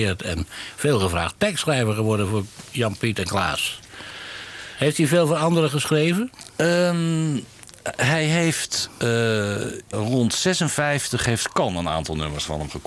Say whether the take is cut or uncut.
cut